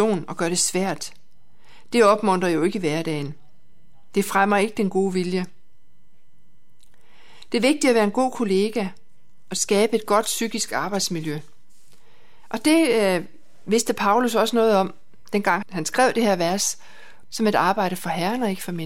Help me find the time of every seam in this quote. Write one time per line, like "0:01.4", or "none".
0:15.6
0:17.2